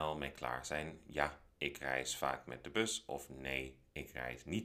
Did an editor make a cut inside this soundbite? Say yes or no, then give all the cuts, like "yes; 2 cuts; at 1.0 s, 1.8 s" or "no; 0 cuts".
no; 0 cuts